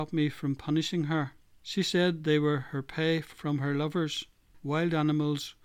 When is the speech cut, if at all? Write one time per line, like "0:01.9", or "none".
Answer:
0:01.6
0:04.6